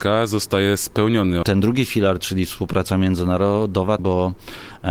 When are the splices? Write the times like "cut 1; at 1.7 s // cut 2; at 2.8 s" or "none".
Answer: cut 1; at 1.4 s // cut 2; at 4.0 s